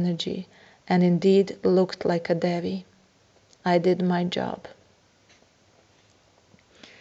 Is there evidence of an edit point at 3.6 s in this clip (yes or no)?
no